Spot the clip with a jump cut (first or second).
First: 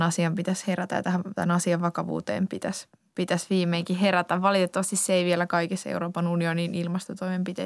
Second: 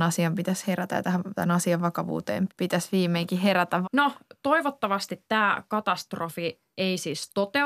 second